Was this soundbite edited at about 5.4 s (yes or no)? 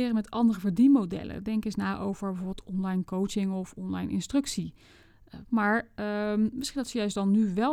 yes